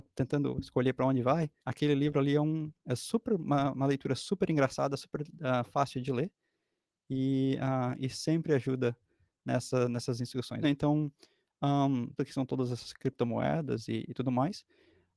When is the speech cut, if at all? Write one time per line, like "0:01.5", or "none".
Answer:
0:01.6
0:10.6
0:12.2